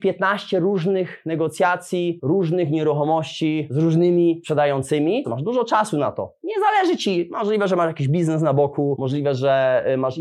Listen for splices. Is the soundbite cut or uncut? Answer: cut